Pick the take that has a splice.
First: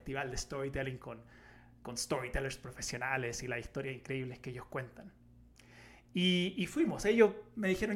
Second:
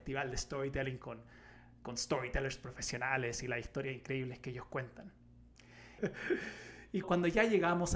second; 2 cuts; at 6.0 s, 7.0 s

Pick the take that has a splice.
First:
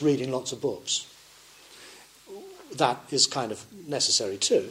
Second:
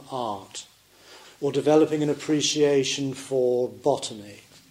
second; 1 cut; at 1.2 s

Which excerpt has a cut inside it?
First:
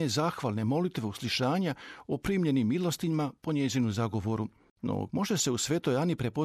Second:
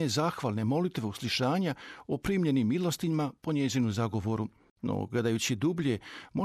first; 1 cut; at 5.1 s

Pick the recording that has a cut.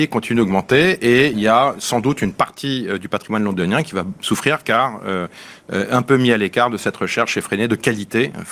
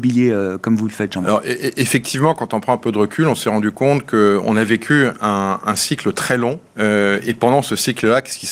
second; 1 cut; at 6.7 s

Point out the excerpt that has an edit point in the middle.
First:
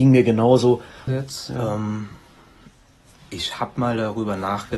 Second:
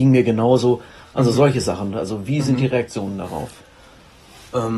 first; 1 cut; at 1.1 s

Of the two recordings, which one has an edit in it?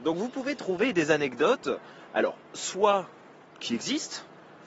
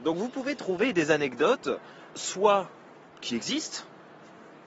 second; 1 cut; at 2.1 s

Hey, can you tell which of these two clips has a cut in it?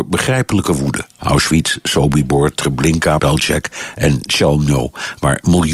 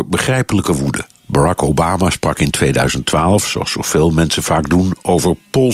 first; 2 cuts; at 1.2 s, 3.2 s

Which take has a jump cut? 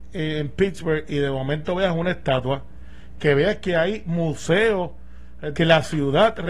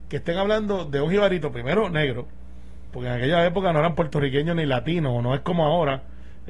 first; 2 cuts; at 3.2 s, 5.5 s

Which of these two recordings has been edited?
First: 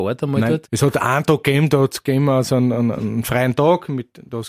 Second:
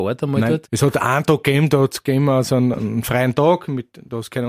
second; 1 cut; at 2.7 s

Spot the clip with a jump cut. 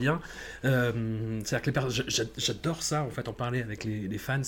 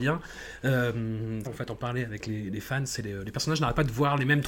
second; 1 cut; at 1.5 s

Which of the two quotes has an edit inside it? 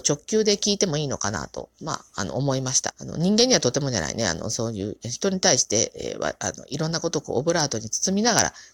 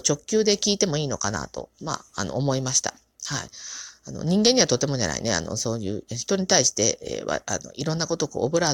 first; 1 cut; at 2.9 s

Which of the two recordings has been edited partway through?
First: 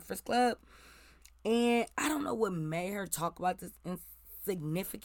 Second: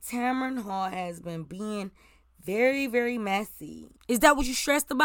second; 1 cut; at 3.9 s

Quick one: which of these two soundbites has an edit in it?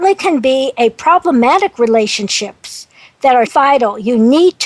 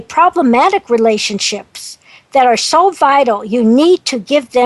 first; 1 cut; at 3.5 s

